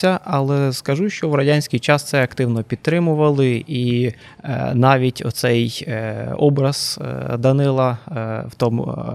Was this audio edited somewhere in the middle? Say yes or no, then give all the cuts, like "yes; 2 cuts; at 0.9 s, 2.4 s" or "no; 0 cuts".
no; 0 cuts